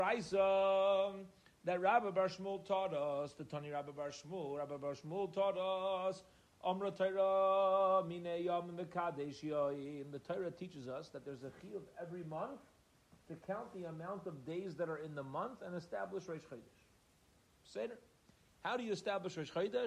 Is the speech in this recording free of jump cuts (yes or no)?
yes